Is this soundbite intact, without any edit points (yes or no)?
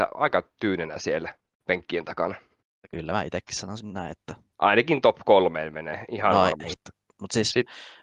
no